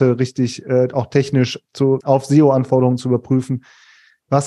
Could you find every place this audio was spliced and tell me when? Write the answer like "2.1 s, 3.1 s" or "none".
2.0 s